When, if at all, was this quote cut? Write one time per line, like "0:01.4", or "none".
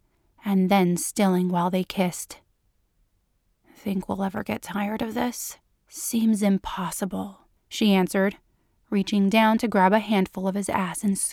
0:05.8
0:07.6